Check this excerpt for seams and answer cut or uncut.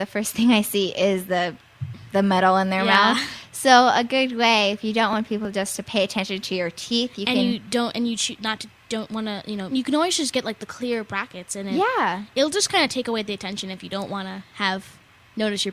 cut